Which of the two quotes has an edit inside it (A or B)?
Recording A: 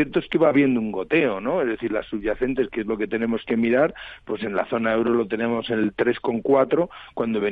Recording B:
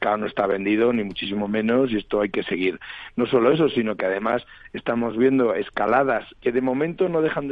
B